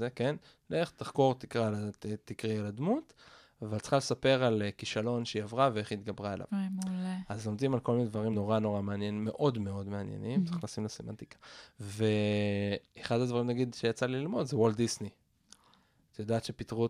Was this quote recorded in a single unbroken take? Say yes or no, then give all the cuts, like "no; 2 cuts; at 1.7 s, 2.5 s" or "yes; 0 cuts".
yes; 0 cuts